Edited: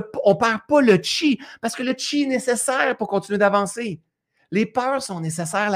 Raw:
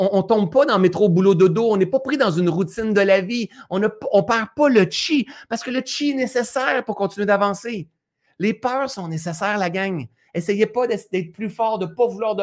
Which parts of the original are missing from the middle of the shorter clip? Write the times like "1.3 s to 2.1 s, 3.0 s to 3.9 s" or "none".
none